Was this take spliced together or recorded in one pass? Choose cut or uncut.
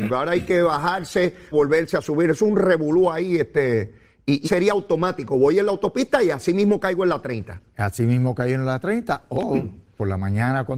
cut